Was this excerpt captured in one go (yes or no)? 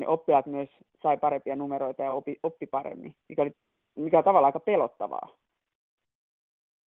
yes